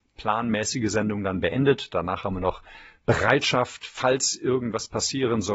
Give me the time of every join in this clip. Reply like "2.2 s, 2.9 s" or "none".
none